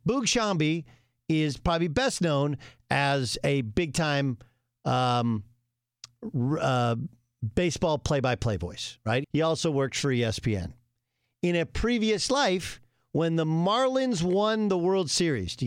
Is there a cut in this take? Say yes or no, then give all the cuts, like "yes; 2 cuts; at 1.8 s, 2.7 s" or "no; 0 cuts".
yes; 1 cut; at 9.2 s